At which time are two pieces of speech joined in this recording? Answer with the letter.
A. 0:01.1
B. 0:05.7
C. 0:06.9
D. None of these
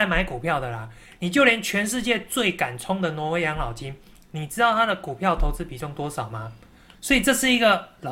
C